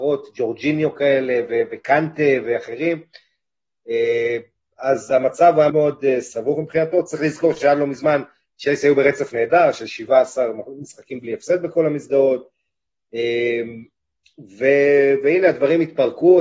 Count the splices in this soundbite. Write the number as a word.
one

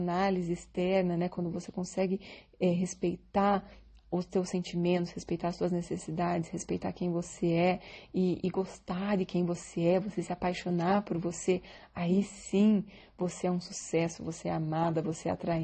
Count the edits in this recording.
zero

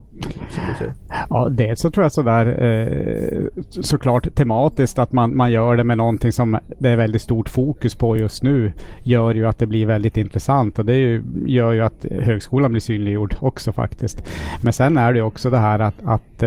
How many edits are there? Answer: zero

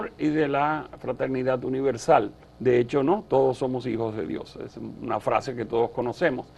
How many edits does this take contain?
one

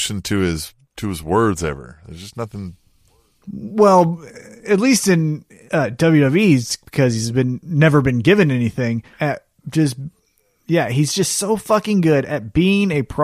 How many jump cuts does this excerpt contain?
one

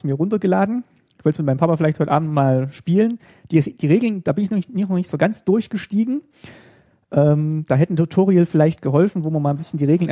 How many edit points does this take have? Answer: zero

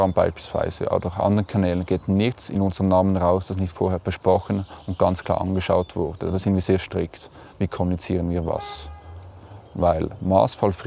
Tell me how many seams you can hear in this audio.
zero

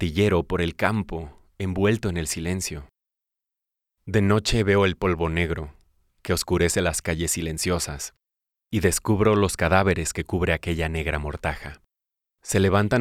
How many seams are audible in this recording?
zero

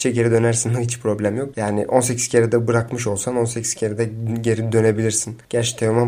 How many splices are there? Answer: one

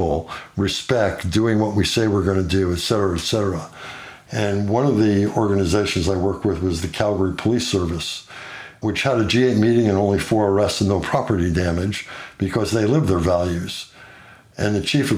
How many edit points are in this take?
zero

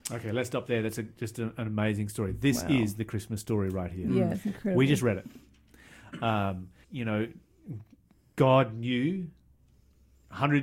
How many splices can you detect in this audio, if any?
one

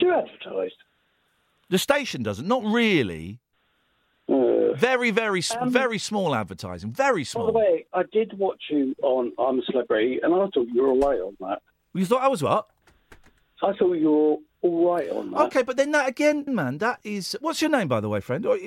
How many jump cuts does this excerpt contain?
one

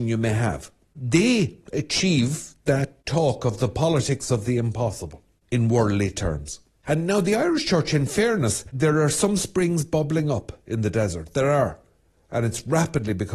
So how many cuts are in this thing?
one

